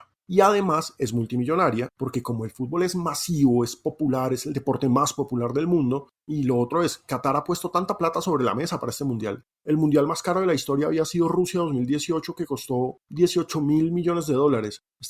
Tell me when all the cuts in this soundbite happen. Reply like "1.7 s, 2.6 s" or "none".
none